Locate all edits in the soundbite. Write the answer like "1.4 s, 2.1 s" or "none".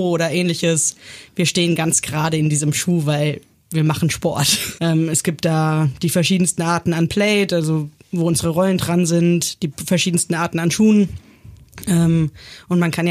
4.8 s